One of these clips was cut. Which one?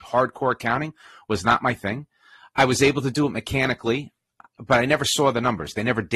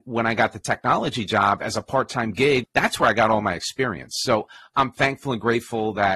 second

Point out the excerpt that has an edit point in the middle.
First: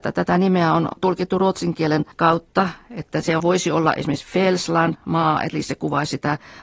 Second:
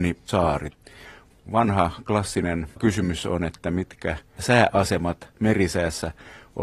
first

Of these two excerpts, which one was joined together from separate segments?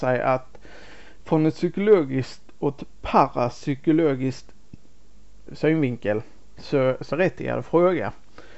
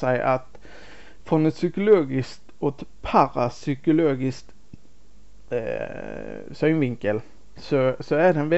first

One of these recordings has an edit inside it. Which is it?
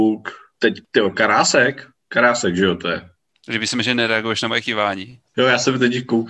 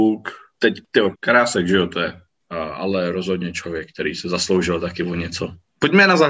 second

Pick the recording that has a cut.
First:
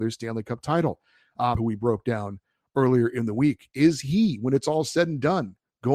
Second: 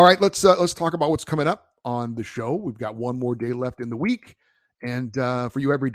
first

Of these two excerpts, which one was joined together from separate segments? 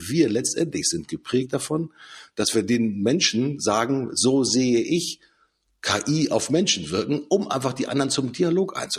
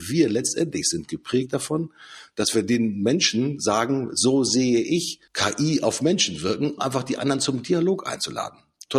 second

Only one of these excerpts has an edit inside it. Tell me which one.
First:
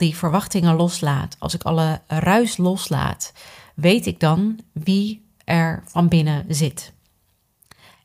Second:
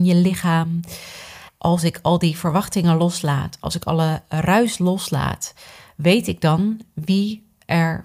second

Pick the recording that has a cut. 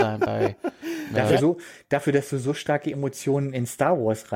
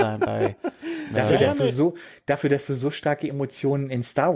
first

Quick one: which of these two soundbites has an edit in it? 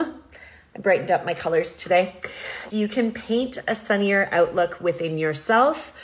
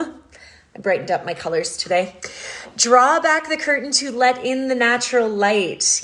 first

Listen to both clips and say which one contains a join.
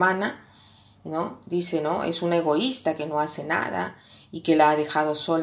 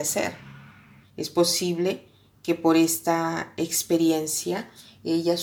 second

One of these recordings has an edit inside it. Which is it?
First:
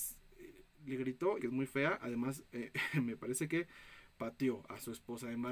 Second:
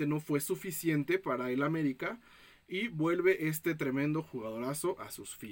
first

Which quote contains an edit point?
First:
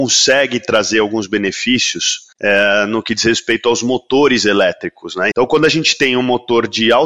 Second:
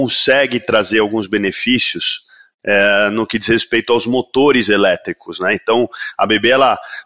first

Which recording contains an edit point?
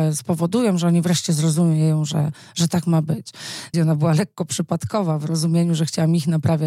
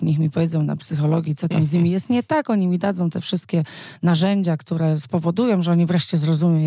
first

